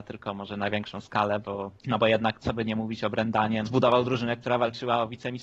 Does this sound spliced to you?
yes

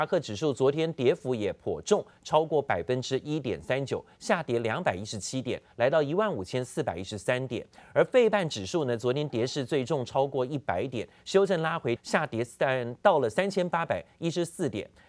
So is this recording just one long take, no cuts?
no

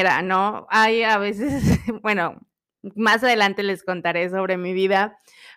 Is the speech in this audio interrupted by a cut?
no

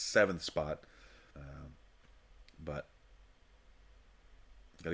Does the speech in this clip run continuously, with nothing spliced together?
no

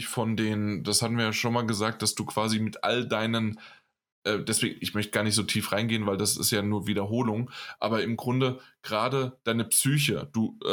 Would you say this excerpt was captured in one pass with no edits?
yes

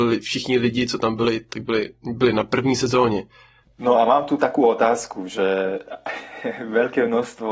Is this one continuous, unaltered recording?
no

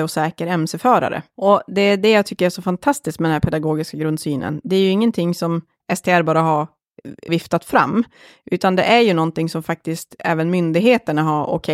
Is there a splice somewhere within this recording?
yes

